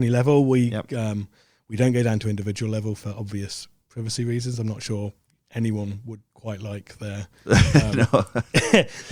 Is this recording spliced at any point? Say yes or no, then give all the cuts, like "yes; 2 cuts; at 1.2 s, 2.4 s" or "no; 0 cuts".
no; 0 cuts